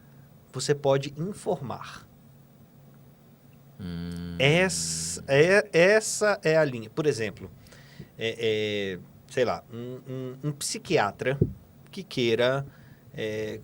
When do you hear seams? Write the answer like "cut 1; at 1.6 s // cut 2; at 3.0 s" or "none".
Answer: none